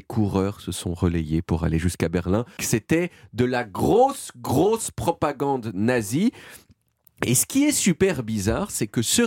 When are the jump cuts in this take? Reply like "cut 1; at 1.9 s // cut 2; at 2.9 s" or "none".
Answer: cut 1; at 2.6 s